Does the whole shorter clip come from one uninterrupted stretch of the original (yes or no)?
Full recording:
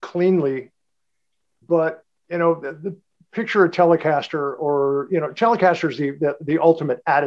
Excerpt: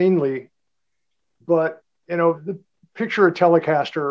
no